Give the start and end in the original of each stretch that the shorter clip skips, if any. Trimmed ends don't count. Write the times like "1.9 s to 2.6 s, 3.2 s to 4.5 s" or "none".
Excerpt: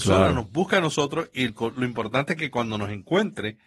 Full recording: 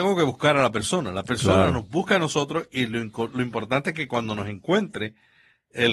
2.9 s to 3.1 s